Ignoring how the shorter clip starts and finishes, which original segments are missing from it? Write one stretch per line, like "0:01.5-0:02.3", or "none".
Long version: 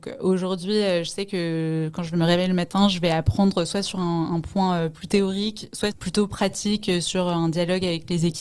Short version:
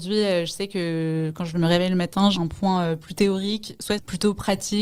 0:02.9-0:04.3